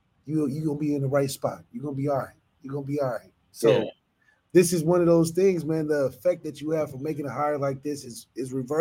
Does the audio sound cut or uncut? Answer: uncut